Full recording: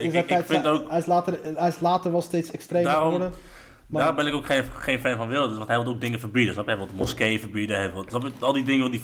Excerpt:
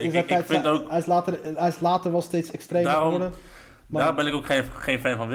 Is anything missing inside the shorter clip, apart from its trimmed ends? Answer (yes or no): no